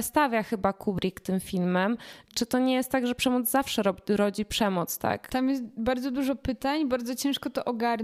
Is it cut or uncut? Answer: cut